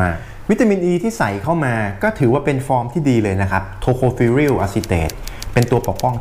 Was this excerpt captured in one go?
yes; 0 cuts

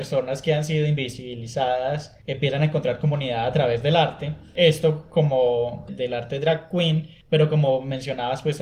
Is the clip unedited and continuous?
no; 1 cut; at 5.9 s

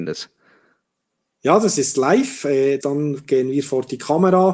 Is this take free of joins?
no; 1 cut; at 2.8 s

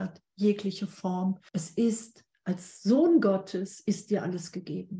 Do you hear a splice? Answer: yes; 1 cut; at 1.5 s

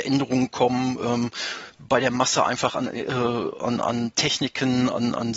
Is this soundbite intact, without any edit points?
yes; 0 cuts

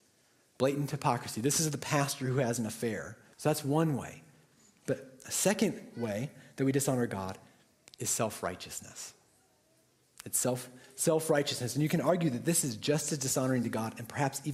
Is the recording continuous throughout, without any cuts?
no; 1 cut; at 3.3 s

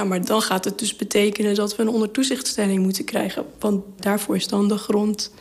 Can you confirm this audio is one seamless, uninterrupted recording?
yes; 0 cuts

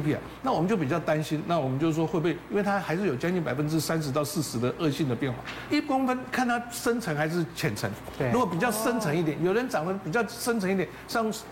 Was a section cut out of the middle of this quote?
yes; 1 cut; at 5.7 s

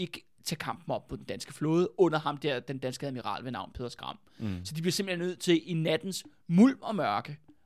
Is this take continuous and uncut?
yes; 0 cuts

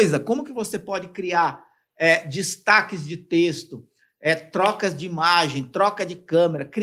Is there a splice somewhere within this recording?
no; 0 cuts

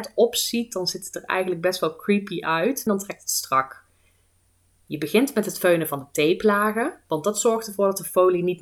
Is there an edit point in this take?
yes; 1 cut; at 2.9 s

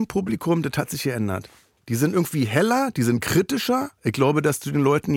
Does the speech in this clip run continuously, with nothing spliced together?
yes; 0 cuts

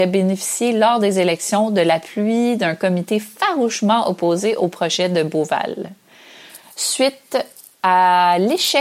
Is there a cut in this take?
no; 0 cuts

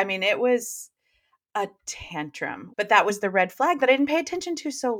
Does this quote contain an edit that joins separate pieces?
yes; 1 cut; at 2.7 s

